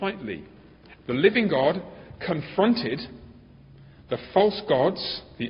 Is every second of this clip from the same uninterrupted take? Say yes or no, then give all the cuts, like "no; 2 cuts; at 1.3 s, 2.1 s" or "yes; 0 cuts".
no; 1 cut; at 0.9 s